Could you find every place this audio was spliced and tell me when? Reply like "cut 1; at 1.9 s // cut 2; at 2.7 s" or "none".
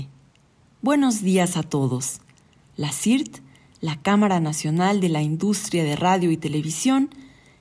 cut 1; at 2.7 s